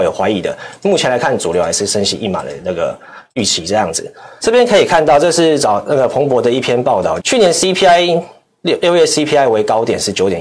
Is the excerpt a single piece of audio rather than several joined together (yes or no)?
no